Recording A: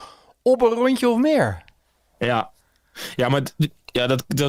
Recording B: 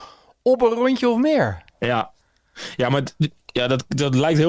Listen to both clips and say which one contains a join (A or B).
B